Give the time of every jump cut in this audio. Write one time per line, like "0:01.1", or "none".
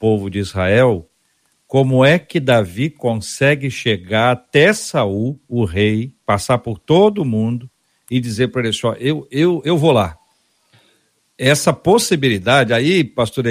none